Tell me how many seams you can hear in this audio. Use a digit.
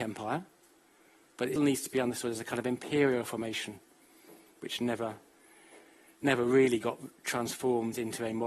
1